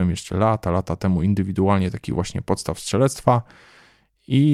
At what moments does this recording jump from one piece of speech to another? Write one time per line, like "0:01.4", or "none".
none

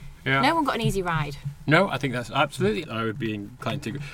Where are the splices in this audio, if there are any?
0:02.8

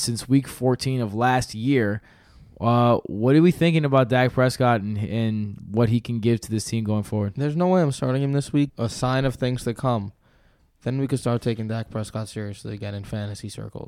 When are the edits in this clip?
0:08.7

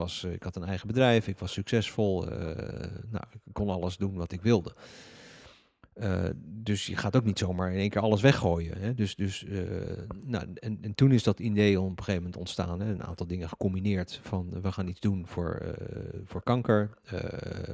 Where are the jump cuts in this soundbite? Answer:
none

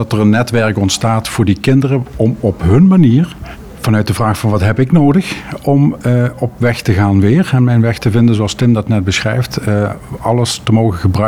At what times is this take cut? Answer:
none

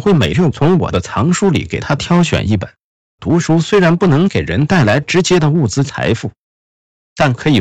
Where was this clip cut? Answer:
0:03.0

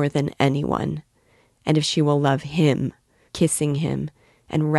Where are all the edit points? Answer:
0:03.3

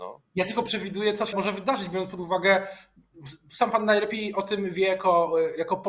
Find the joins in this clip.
0:01.3

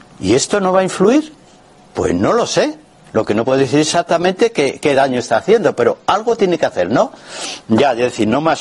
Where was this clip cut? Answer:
none

